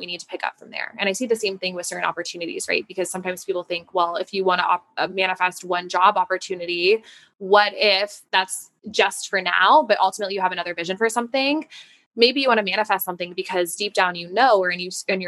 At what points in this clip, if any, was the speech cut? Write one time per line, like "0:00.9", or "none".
none